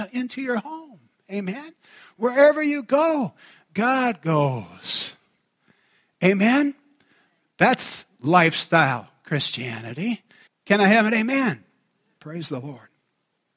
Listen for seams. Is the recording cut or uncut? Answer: cut